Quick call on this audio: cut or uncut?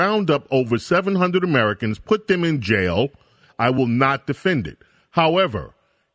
cut